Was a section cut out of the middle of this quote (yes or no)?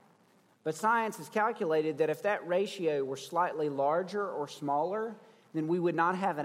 no